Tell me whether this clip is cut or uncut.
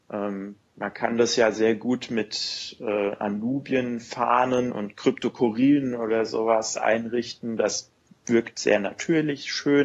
cut